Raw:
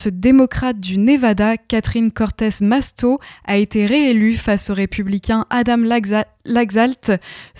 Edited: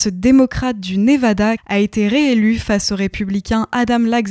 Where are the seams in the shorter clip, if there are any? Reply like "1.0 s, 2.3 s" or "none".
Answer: 1.6 s